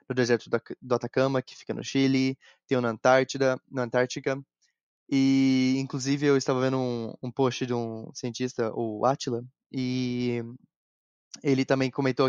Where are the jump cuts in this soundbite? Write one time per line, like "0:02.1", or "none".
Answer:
none